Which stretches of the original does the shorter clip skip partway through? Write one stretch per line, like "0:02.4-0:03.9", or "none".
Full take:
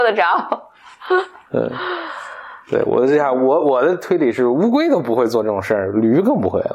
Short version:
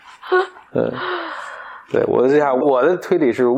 0:03.4-0:03.6